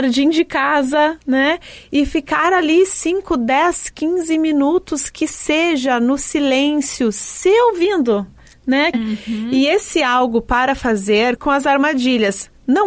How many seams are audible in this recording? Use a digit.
2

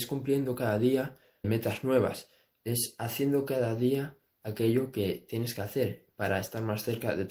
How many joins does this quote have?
1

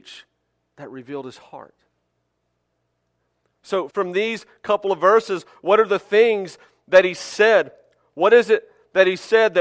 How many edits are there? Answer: 1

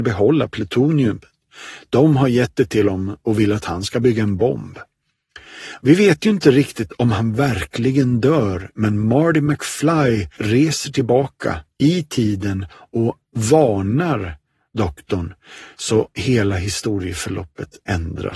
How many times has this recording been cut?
1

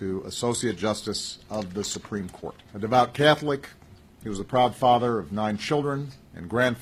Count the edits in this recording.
1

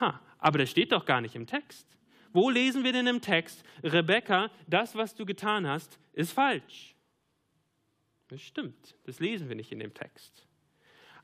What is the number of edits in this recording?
0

